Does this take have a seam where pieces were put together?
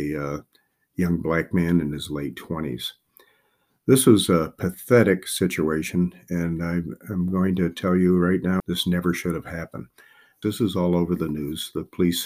yes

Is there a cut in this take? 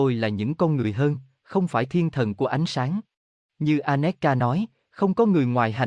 yes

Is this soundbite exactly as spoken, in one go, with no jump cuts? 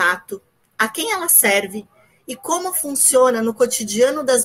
yes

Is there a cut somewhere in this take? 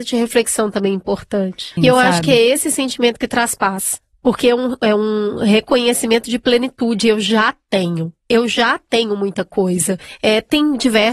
yes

